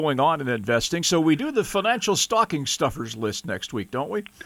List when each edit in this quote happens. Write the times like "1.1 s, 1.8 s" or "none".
none